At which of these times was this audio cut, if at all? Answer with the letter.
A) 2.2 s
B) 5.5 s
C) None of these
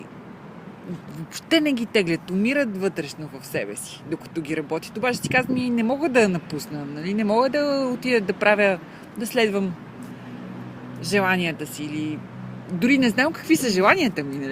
C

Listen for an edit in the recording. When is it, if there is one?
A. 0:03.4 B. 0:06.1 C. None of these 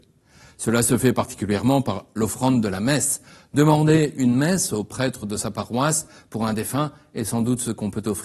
C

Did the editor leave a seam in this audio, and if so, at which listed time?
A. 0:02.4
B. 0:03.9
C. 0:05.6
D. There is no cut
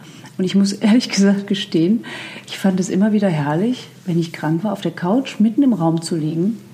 D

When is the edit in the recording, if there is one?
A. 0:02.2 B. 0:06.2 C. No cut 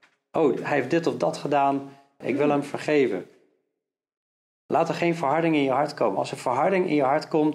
A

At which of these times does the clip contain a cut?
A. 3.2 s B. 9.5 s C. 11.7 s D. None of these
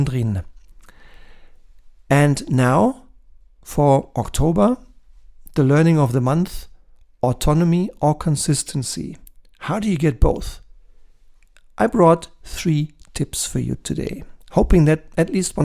D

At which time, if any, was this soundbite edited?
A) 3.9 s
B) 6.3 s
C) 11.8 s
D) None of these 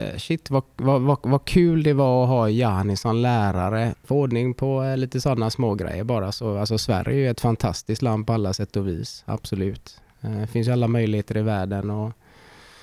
A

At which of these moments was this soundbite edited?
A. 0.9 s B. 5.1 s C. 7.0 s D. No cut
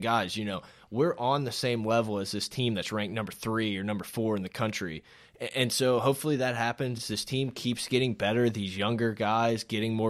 D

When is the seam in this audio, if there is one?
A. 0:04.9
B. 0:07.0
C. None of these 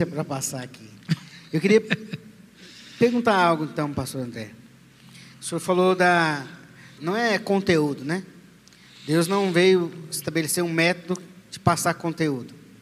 B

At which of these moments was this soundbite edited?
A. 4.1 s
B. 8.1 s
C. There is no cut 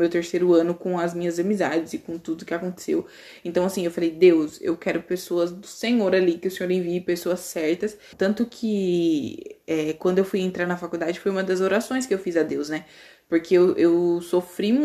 B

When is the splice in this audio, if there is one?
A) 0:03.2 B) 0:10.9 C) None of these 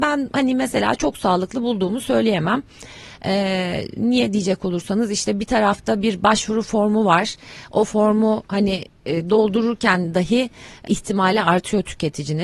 B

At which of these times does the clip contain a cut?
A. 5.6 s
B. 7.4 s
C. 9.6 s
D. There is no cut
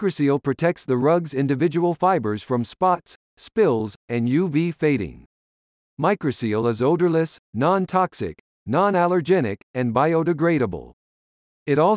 D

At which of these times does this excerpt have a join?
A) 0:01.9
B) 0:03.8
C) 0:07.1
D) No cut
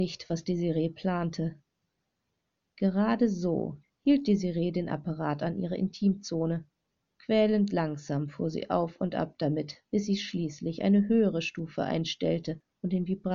B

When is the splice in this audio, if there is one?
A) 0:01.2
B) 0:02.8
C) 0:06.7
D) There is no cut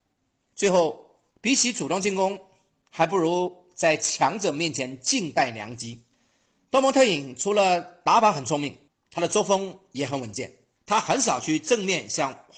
D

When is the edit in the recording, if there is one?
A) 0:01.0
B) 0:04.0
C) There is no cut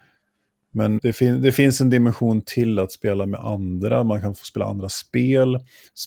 A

